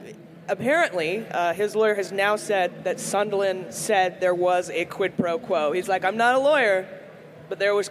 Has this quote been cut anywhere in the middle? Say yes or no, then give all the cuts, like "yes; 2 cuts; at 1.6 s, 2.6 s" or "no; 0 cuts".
no; 0 cuts